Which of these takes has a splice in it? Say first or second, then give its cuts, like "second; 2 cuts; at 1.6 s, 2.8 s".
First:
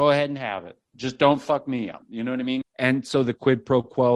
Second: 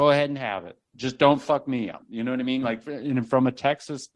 first; 1 cut; at 2.6 s